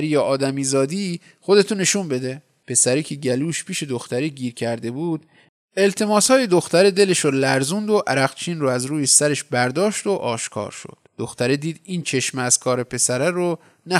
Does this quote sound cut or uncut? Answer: cut